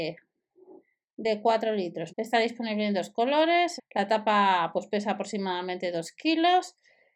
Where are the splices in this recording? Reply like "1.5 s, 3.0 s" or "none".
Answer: 2.1 s, 3.8 s